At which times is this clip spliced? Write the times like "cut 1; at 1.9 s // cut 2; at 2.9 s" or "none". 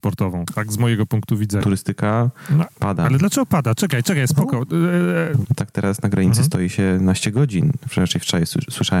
cut 1; at 1.6 s // cut 2; at 5.4 s